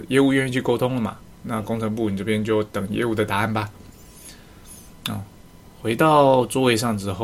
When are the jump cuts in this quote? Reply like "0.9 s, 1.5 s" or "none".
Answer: none